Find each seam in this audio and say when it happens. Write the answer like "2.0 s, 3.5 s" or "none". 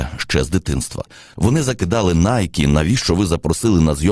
1.3 s